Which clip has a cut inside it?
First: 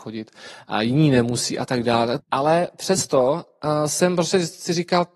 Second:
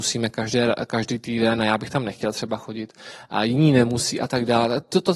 first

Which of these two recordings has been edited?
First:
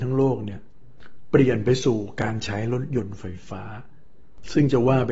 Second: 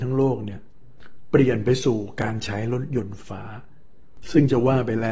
second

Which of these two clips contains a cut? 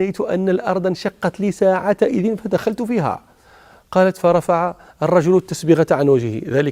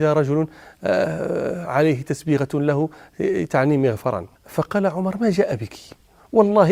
second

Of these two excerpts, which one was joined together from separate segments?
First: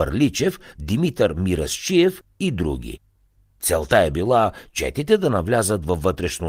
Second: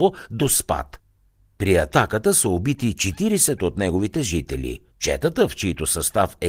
second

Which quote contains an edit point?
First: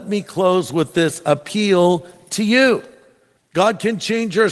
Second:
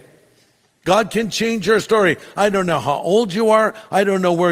first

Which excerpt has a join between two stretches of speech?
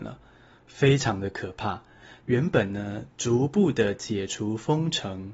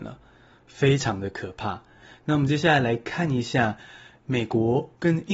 first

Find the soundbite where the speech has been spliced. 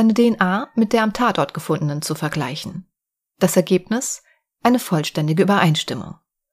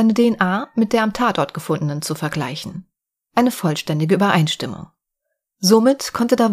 second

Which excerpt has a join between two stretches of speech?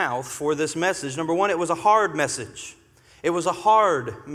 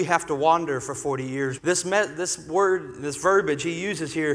second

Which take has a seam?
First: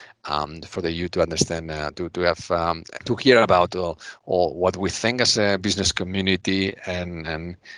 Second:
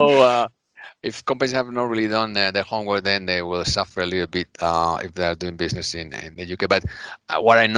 first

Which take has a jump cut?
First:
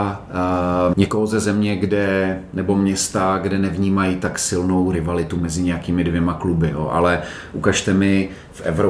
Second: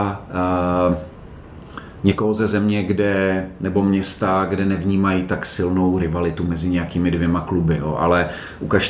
first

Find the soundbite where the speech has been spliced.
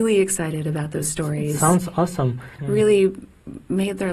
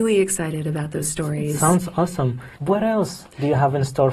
first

